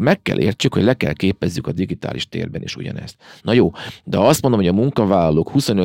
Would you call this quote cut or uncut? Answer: cut